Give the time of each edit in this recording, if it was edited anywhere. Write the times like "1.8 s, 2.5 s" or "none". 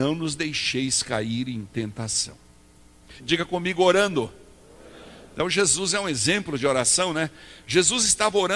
3.2 s